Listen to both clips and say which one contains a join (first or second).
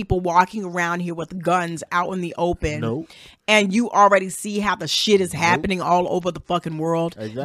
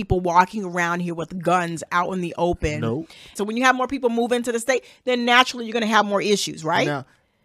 second